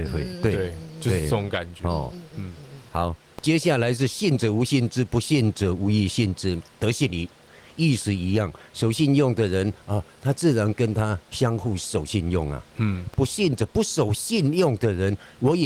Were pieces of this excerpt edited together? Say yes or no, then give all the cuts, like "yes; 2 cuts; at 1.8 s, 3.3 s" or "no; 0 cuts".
no; 0 cuts